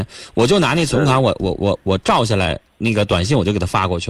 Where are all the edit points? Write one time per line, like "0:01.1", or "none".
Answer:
0:01.6